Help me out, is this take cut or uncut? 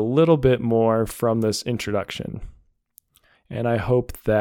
cut